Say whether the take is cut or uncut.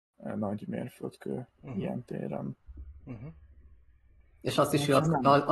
uncut